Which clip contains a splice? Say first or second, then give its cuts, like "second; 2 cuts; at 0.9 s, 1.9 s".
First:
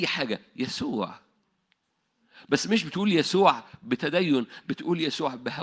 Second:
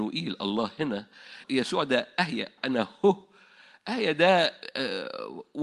second; 1 cut; at 1.4 s